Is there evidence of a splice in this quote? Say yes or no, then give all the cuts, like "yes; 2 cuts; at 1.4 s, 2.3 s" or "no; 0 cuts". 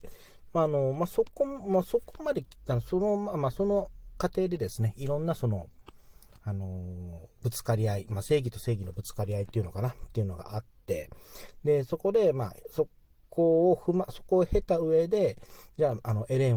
no; 0 cuts